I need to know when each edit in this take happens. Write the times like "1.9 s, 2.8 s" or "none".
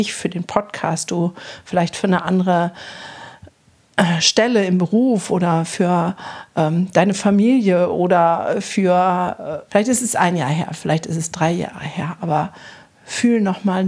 9.7 s